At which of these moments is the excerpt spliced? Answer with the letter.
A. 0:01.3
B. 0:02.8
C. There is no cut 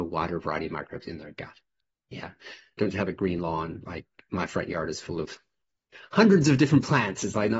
B